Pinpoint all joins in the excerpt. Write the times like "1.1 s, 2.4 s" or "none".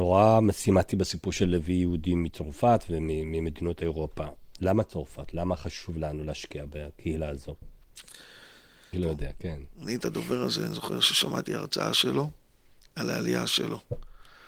8.9 s